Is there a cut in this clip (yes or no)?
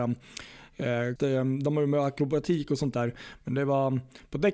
yes